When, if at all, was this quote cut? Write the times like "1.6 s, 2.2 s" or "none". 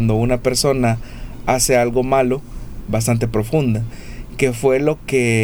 2.9 s

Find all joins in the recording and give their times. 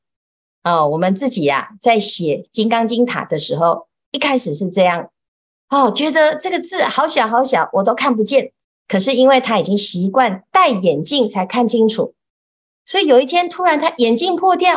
8.8 s

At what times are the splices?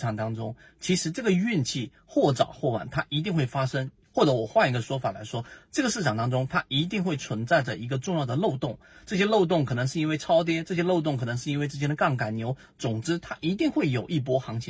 none

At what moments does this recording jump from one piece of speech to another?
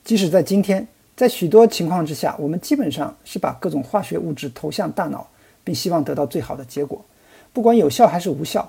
none

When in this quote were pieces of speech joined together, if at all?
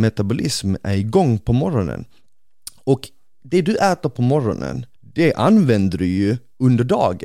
4.9 s

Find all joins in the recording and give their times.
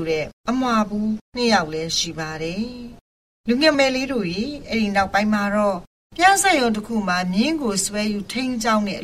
3.7 s

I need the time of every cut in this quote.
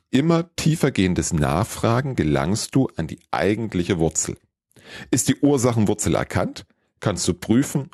none

